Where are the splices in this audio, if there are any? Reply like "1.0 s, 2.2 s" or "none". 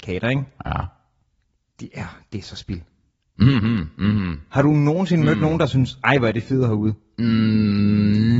none